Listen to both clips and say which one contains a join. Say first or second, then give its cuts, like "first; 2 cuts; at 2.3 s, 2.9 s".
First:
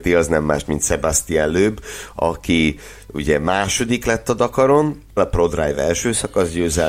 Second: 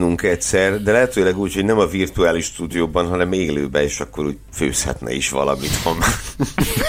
first; 1 cut; at 5.2 s